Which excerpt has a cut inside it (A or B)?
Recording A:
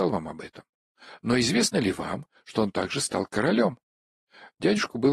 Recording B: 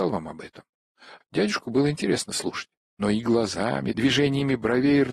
B